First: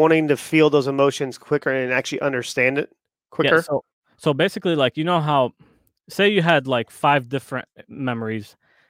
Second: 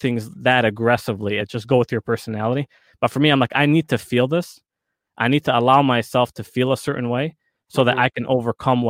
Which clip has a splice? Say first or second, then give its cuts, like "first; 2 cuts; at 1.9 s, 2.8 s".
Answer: second; 1 cut; at 1.4 s